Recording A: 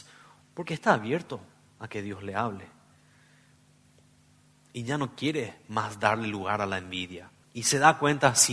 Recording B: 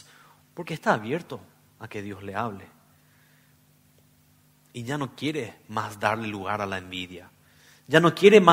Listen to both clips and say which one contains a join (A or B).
A